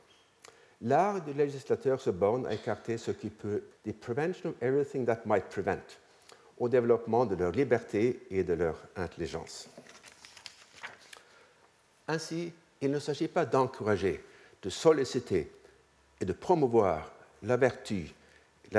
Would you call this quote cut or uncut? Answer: cut